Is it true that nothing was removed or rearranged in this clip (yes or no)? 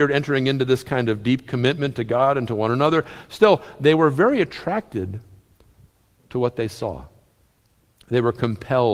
yes